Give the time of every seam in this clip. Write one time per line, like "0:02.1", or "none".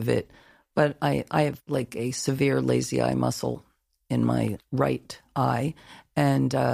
none